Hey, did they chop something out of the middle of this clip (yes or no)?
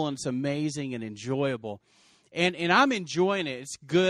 no